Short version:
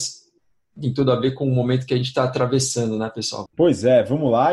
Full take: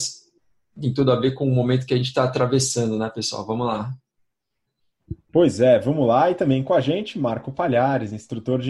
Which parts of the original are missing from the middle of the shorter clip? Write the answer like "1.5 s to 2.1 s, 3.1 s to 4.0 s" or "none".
3.5 s to 5.2 s